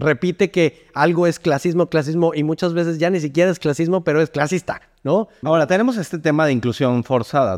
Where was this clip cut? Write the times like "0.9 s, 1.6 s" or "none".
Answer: 1.9 s, 5.4 s